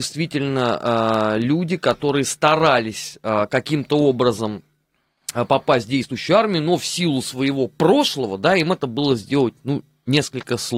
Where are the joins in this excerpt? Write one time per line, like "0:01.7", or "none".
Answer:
none